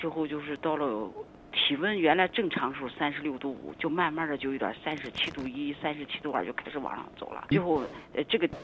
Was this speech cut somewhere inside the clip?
yes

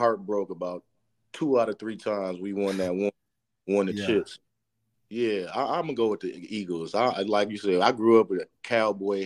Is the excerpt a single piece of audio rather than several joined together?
no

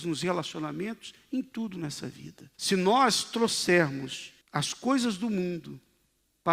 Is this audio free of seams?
no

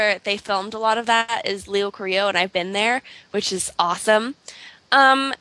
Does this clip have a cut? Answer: no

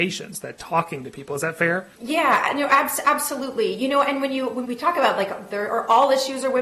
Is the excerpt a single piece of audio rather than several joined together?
no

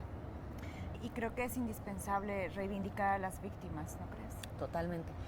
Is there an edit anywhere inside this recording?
yes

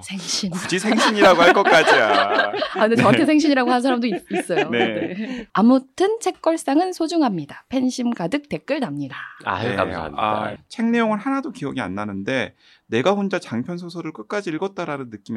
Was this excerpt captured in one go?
no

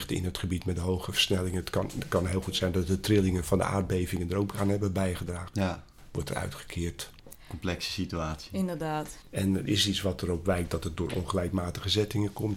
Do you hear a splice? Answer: yes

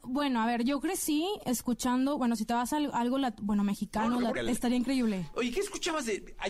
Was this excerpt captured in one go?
no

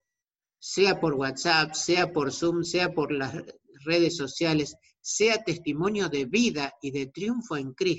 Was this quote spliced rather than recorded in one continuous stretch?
no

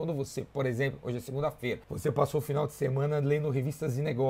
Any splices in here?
yes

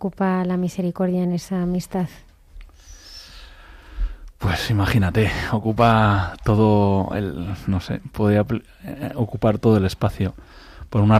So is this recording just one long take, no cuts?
no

